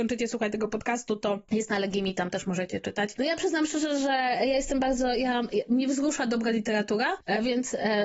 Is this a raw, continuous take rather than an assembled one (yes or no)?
yes